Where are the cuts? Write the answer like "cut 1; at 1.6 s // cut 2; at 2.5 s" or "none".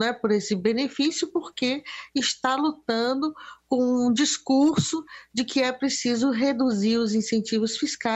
none